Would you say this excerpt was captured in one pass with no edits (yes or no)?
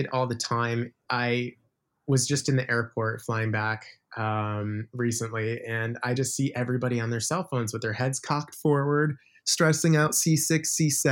yes